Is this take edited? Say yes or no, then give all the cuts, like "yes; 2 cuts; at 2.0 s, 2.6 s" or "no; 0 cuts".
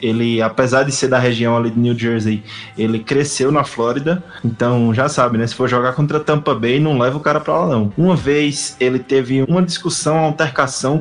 yes; 2 cuts; at 7.9 s, 9.4 s